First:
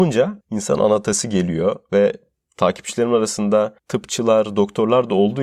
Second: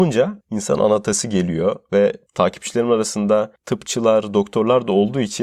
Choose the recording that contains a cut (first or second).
second